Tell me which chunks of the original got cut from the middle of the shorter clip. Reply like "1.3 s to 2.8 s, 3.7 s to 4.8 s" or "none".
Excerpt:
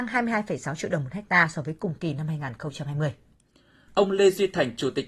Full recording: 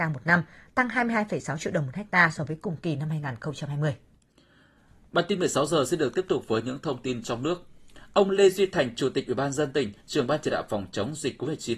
4.7 s to 8.1 s